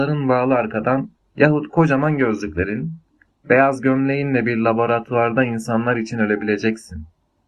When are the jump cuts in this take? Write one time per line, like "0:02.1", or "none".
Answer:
0:01.2